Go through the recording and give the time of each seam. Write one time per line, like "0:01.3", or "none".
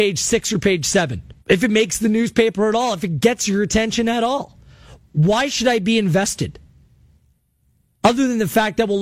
0:01.4
0:05.0